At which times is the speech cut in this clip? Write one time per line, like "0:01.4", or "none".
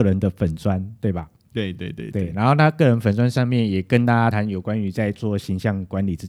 0:01.7
0:04.3